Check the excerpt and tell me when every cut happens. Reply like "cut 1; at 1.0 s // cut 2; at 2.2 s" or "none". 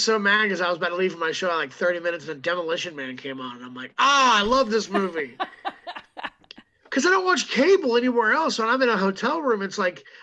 none